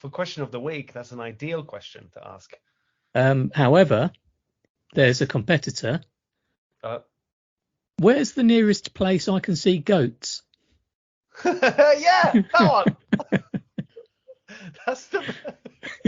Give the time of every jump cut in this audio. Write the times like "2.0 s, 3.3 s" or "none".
none

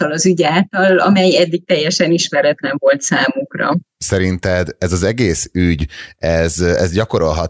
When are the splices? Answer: none

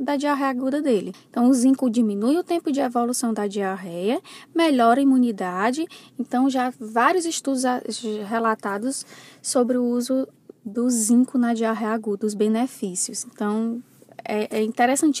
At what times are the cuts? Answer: 1.1 s

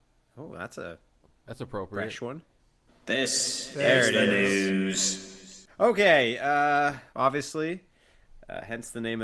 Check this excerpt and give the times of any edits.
5.7 s, 7.1 s

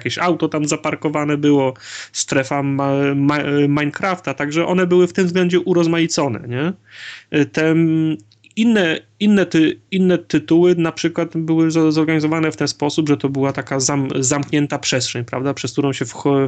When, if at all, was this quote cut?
none

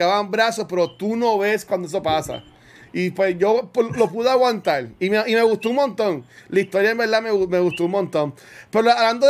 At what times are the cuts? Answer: none

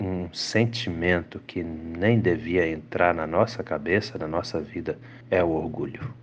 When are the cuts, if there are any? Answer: 5.2 s

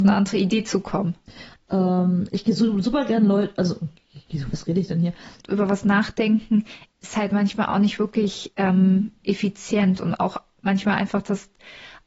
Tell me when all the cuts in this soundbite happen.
1.5 s, 5.4 s

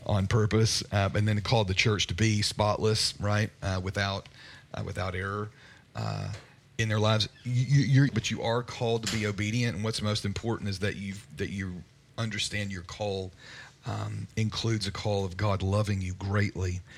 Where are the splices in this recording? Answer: 8.1 s

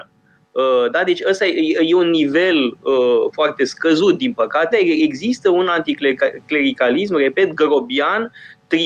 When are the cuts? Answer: 4.7 s

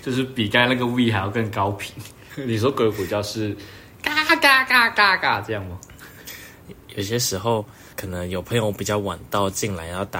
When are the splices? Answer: 2.3 s

